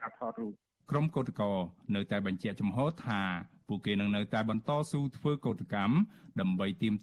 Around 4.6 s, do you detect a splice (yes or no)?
yes